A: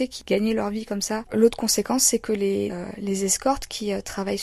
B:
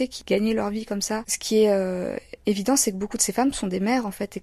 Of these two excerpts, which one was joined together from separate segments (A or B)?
A